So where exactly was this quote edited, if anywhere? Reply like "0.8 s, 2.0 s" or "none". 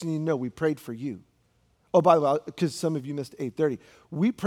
none